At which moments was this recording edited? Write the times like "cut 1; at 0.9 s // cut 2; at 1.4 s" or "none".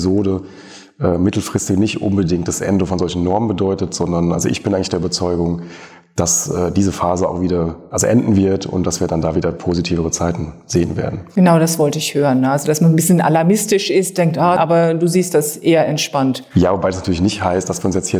cut 1; at 14.6 s